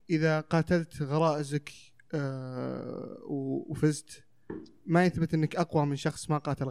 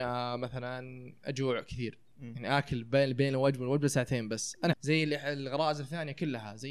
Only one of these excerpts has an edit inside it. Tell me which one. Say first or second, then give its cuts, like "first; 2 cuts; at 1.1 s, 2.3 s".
second; 1 cut; at 4.7 s